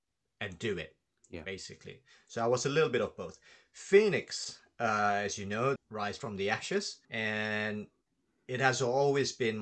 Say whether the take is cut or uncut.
cut